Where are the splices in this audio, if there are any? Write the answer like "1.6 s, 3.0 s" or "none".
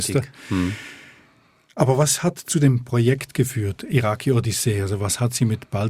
none